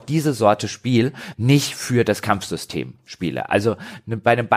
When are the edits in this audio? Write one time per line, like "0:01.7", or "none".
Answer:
0:01.3